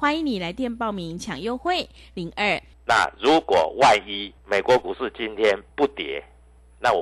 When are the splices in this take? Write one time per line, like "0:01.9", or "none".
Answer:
0:02.7
0:04.4
0:05.7